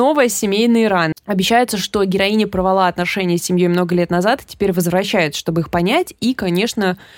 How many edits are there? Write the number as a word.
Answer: one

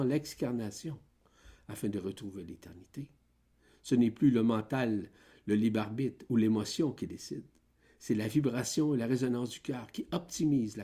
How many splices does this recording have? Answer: zero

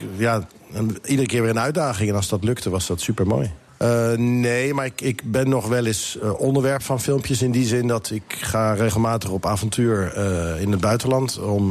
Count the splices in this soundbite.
one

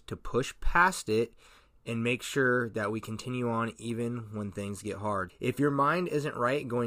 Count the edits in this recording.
one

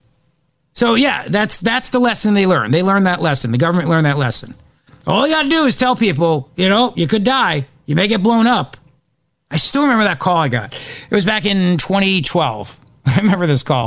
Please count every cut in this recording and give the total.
zero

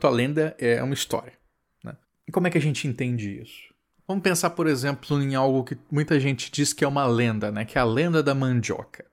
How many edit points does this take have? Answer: one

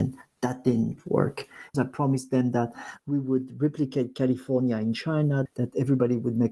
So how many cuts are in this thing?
two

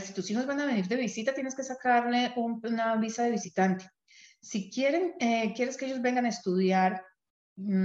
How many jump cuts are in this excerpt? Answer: zero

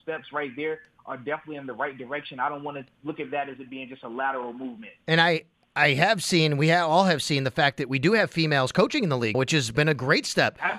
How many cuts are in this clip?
two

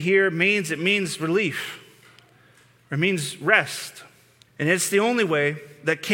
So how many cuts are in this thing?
one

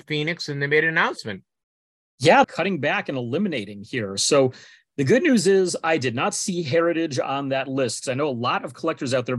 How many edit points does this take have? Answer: one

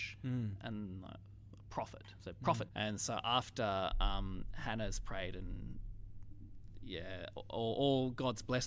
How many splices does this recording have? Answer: one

